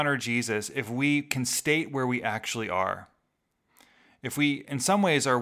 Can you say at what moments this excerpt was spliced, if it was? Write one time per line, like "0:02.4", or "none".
none